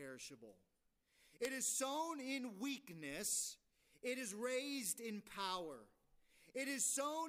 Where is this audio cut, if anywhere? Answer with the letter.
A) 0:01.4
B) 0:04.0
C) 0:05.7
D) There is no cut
A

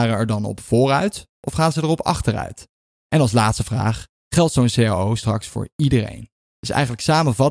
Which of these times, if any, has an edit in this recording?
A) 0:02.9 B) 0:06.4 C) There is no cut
A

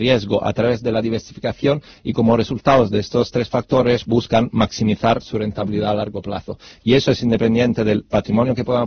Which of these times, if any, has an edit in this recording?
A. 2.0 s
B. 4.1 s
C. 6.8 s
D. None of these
B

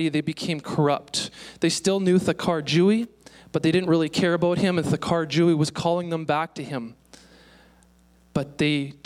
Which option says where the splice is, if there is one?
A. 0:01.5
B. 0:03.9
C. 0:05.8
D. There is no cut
D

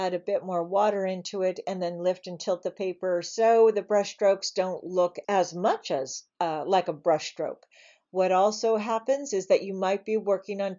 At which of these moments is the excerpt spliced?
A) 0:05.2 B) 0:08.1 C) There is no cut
A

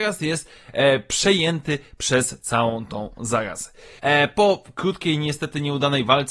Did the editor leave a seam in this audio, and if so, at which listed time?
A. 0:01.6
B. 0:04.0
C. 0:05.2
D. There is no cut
B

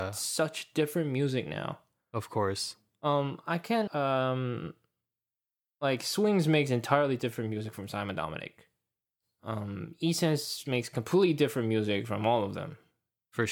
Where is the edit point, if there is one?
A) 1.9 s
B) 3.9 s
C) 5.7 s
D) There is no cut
B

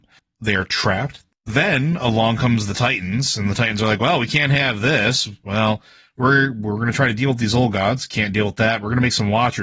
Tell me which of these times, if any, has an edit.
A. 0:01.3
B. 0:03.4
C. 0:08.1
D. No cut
A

